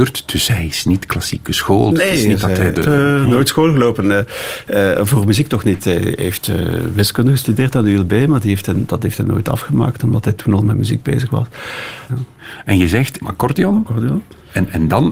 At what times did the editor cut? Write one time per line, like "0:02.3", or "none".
0:02.8
0:12.1
0:13.2